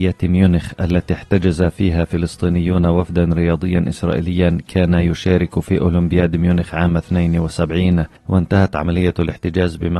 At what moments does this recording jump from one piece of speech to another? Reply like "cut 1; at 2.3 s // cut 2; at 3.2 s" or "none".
cut 1; at 8.2 s